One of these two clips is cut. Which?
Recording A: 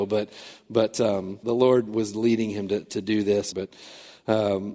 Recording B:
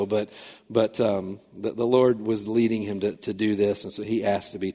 A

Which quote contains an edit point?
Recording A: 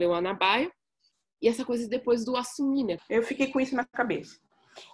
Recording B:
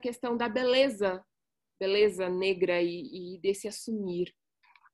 A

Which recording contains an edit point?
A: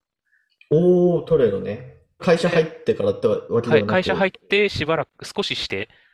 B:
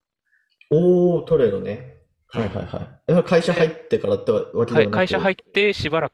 A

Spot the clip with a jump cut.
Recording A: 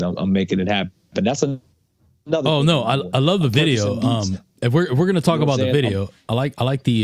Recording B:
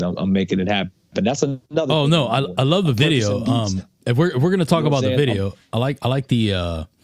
B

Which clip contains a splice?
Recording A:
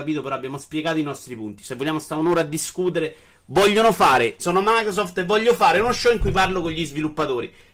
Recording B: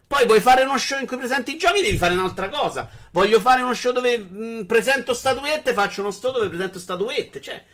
A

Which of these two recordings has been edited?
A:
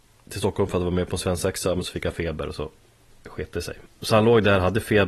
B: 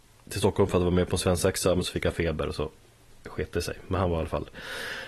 A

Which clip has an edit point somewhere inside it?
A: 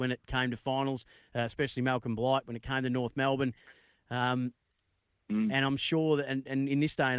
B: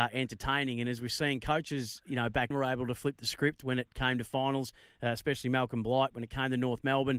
B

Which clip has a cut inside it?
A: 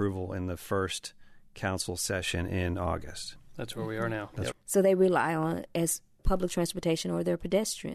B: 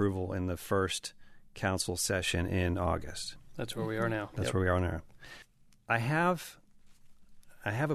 A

